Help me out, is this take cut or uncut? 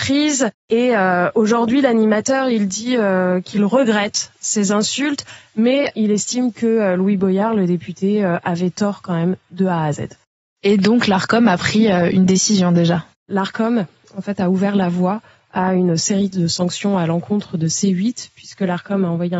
uncut